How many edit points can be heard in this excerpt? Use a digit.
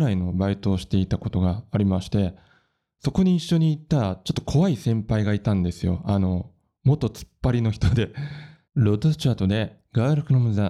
1